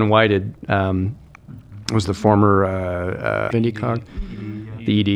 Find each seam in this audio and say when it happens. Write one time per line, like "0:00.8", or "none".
0:03.5